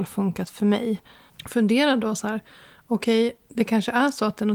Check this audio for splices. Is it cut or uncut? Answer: cut